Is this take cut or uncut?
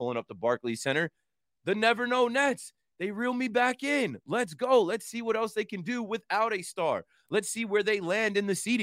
uncut